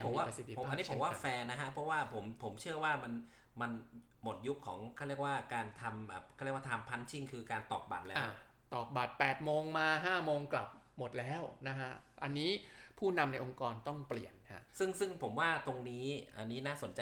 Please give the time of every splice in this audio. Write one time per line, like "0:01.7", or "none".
0:14.7